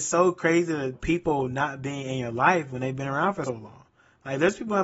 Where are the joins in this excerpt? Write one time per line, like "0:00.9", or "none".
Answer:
0:00.9
0:03.4